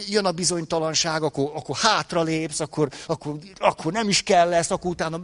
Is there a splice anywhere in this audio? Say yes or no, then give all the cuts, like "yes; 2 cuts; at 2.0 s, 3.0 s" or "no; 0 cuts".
no; 0 cuts